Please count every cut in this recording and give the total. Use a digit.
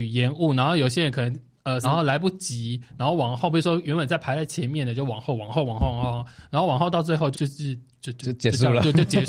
2